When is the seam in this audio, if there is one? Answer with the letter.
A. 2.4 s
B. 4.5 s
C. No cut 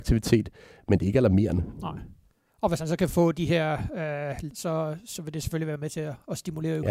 B